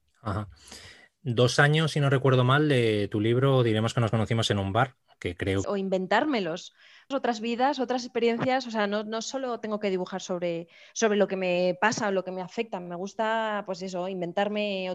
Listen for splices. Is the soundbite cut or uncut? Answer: cut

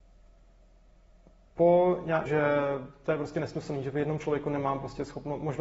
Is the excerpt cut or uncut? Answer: cut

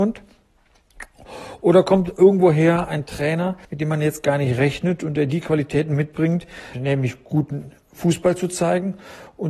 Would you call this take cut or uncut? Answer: cut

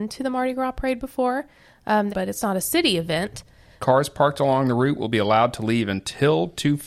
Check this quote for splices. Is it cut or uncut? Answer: cut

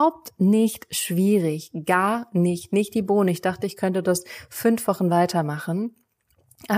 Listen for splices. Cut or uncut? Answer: uncut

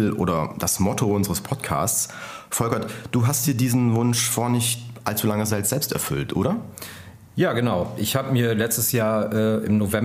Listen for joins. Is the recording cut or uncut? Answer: uncut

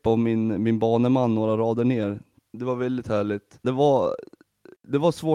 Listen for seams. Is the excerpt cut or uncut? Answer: cut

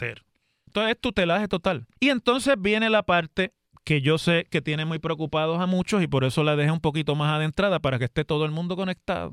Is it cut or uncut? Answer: cut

